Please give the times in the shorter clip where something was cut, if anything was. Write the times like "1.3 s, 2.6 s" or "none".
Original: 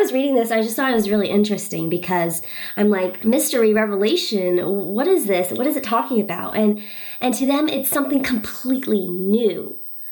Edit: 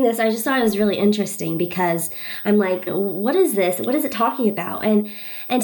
2.9 s